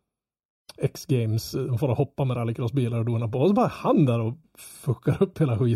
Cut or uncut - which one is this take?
uncut